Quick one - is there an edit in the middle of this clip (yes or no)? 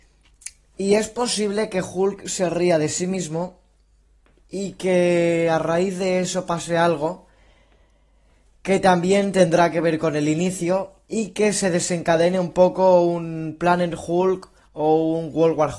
no